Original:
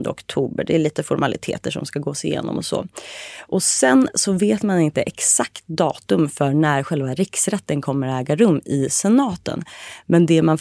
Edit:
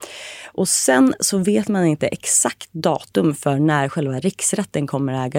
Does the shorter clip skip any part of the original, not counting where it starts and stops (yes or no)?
no